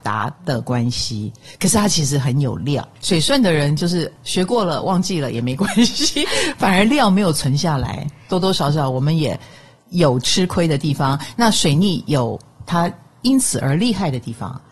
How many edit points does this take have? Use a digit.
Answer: 0